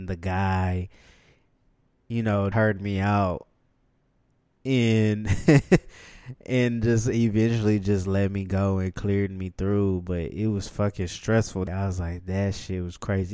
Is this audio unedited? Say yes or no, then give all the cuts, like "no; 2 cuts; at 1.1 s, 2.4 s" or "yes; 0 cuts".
no; 1 cut; at 2.5 s